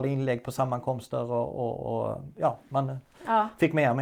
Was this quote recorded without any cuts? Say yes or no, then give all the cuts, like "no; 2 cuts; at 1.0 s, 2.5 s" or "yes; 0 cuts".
yes; 0 cuts